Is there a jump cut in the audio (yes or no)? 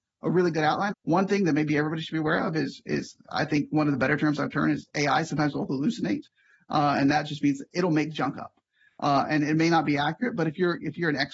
yes